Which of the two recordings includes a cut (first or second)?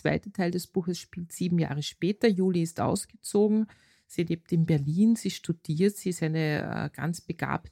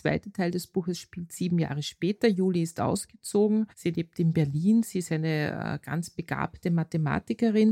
second